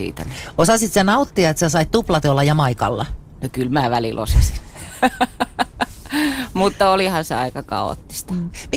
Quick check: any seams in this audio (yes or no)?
no